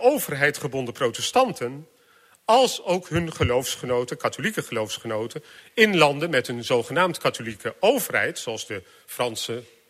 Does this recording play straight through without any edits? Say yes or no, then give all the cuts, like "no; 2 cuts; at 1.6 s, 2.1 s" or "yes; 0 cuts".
yes; 0 cuts